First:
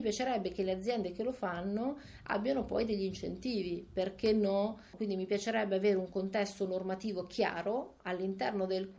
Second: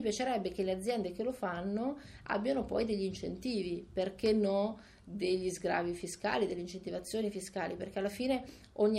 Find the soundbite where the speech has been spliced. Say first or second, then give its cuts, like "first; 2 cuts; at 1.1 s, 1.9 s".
first; 1 cut; at 4.9 s